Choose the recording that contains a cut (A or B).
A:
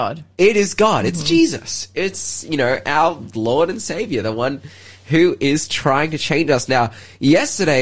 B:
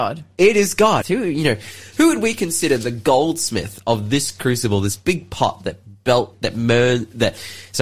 B